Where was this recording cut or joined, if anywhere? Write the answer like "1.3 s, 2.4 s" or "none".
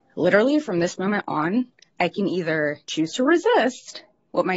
2.8 s